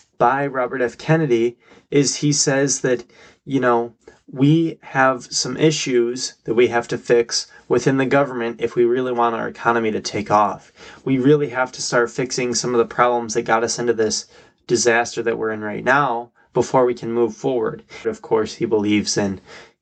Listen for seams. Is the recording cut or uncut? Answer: cut